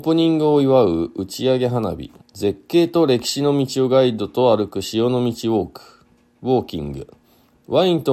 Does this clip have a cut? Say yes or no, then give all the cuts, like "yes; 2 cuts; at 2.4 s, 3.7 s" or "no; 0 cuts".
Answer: yes; 1 cut; at 2.2 s